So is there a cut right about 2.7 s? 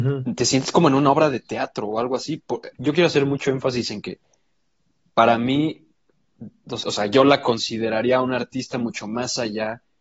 yes; 2 cuts; at 2.7 s, 6.8 s

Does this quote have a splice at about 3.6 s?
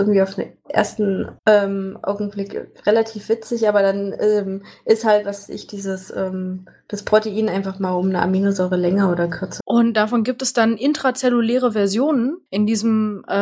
no; 3 cuts; at 1.4 s, 9.6 s, 12.5 s

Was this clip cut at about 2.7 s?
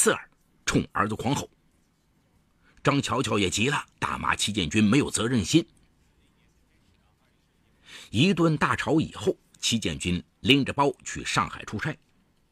no; 1 cut; at 3.9 s

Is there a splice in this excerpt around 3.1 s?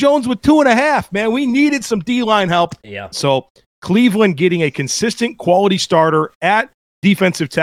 yes; 1 cut; at 3.1 s

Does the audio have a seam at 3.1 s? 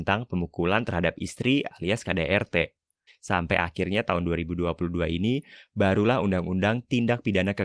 yes; 1 cut; at 3.1 s

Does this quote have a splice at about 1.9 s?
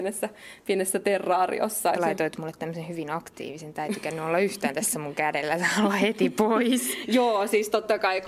yes; 1 cut; at 1.9 s

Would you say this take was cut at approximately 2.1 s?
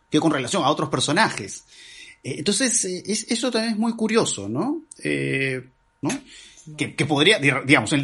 no; 1 cut; at 6.0 s

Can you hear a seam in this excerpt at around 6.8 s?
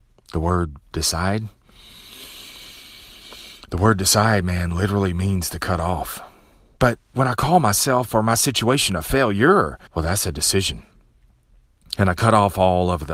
yes; 2 cuts; at 6.8 s, 9.9 s

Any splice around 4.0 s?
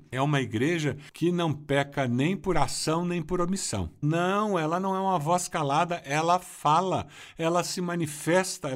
yes; 1 cut; at 4.0 s

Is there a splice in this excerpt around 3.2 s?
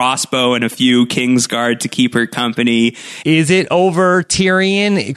yes; 1 cut; at 3.2 s

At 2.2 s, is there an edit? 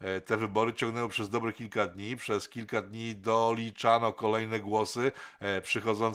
no; 0 cuts

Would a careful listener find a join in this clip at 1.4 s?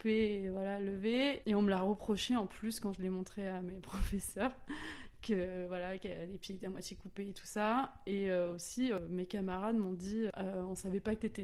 yes; 1 cut; at 1.4 s

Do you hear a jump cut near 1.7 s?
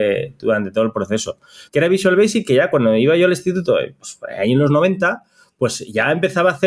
yes; 1 cut; at 1.7 s

